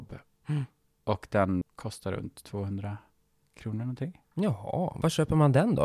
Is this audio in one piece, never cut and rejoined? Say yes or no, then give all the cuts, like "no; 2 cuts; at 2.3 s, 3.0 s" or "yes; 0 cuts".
no; 1 cut; at 1.6 s